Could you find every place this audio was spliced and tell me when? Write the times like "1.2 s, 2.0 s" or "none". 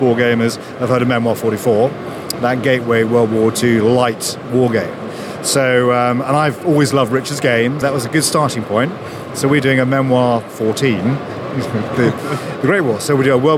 7.8 s